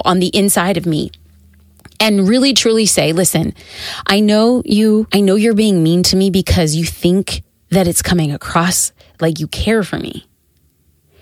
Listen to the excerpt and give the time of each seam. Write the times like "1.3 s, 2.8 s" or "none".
5.1 s